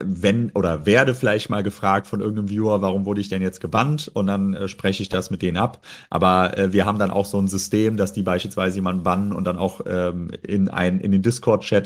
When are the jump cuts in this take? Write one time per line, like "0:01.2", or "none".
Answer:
none